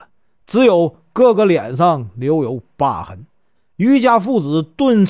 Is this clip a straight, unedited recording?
no; 1 cut; at 3.6 s

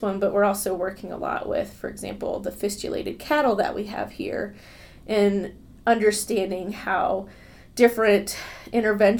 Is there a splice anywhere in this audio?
no; 0 cuts

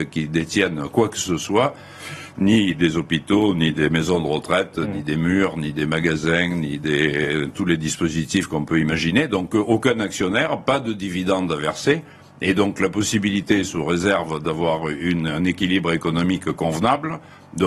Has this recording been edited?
no; 0 cuts

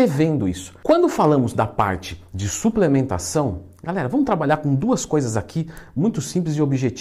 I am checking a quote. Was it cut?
no; 0 cuts

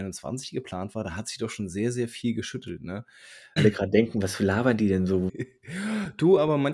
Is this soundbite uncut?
no; 2 cuts; at 3.6 s, 5.3 s

